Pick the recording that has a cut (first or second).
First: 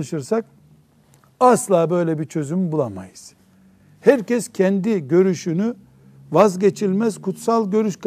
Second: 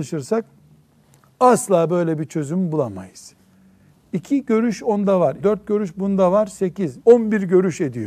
second